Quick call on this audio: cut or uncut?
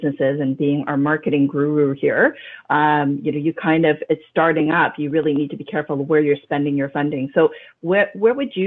uncut